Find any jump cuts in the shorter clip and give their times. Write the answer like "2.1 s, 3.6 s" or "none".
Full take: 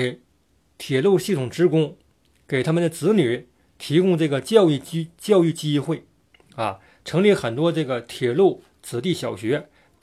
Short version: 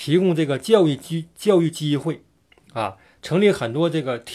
none